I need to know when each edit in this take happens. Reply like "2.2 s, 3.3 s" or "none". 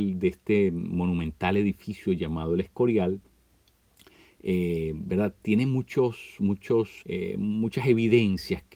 7.0 s